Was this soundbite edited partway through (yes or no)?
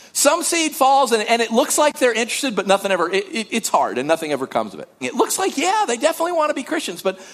yes